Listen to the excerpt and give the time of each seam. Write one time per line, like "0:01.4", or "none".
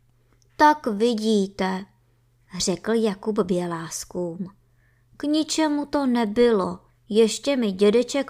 0:06.9

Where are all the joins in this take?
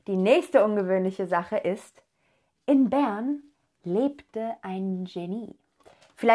none

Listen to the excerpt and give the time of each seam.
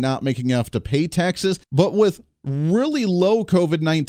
0:01.6

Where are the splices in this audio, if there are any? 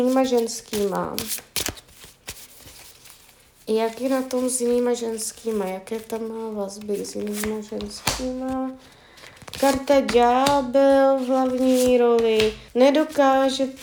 0:12.7

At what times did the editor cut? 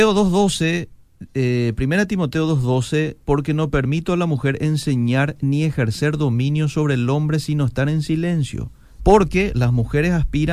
0:03.2
0:09.0

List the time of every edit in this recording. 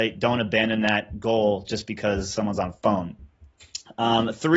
none

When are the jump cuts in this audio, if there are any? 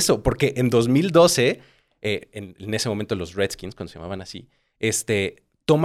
none

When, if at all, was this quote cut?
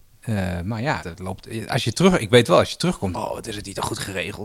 0:01.0
0:03.1

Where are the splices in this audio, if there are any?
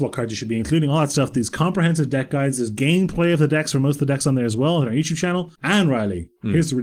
0:05.5

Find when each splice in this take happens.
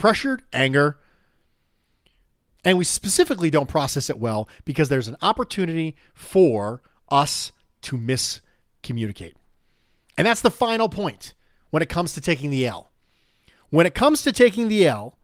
0:02.6

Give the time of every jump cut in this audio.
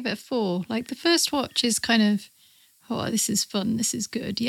none

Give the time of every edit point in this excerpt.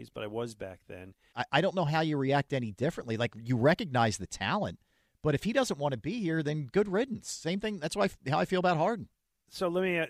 0:01.3

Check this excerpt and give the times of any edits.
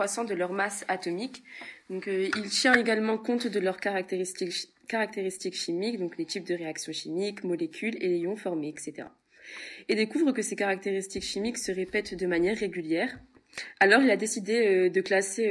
none

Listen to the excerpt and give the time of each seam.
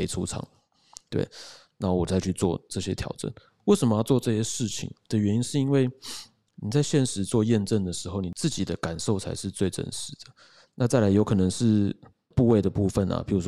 0:10.7

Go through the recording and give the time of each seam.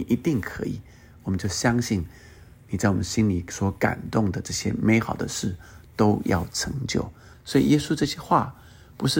0:07.3

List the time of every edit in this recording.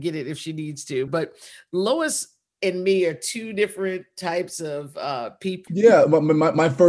0:01.1
0:05.7

